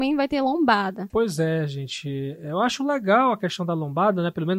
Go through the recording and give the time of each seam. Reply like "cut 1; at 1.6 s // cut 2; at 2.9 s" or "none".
cut 1; at 1.1 s

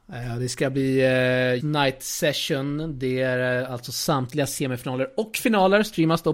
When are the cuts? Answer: cut 1; at 1.6 s

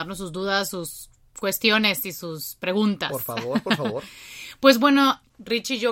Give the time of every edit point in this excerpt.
none

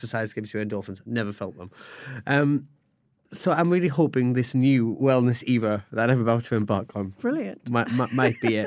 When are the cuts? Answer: none

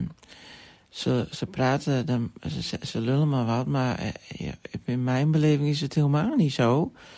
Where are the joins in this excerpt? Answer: none

